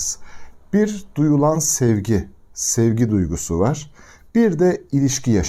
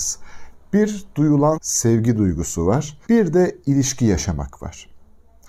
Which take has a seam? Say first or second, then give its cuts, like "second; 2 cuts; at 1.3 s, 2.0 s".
second; 2 cuts; at 1.5 s, 3.0 s